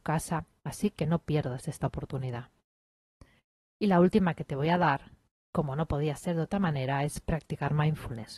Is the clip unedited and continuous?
yes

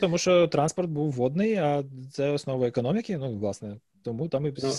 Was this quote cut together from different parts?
no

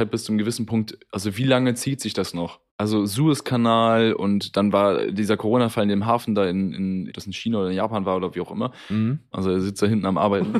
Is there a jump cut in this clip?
yes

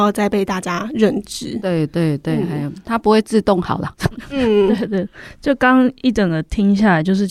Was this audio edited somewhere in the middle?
no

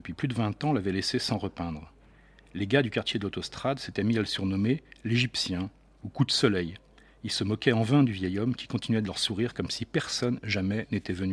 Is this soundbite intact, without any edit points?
yes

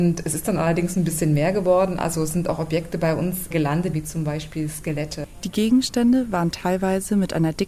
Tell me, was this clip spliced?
yes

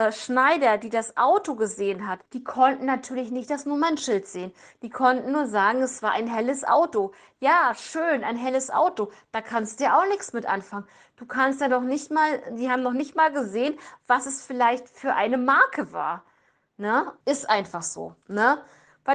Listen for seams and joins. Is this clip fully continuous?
no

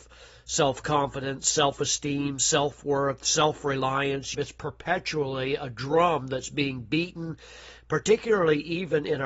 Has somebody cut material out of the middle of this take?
yes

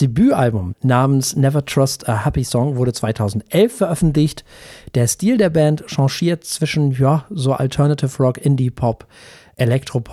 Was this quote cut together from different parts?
no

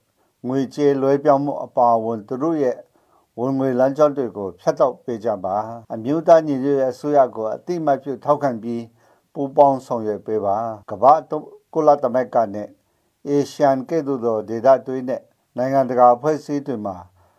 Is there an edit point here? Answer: yes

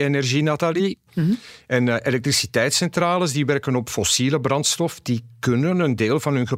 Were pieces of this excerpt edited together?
yes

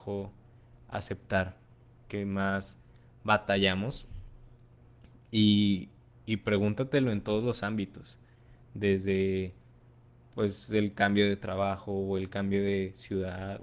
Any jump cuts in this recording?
no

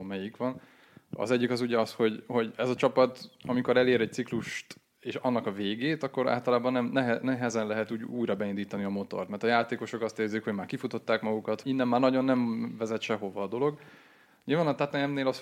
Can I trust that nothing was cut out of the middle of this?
no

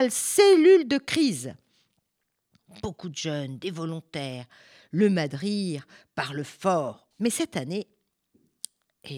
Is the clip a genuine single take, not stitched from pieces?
no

